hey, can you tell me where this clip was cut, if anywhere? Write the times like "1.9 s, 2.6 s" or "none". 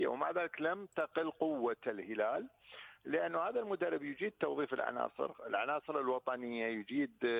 none